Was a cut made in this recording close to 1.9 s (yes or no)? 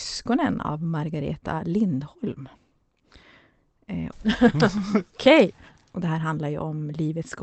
no